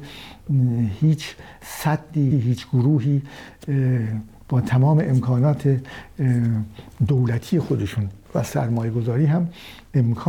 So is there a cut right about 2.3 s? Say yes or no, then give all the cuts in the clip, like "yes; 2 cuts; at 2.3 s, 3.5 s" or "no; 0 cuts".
yes; 2 cuts; at 2.3 s, 8.2 s